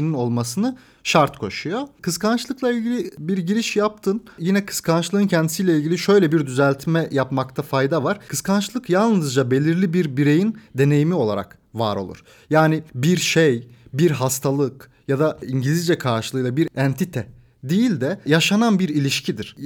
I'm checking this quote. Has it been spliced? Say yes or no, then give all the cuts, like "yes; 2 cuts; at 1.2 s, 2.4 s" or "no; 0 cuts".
no; 0 cuts